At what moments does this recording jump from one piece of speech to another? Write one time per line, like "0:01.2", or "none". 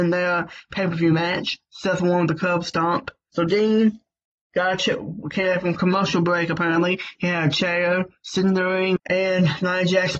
0:03.3
0:09.0